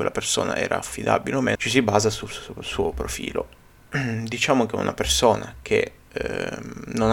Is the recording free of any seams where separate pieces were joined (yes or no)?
no